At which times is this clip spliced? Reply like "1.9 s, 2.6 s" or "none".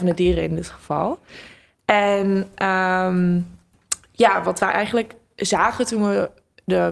none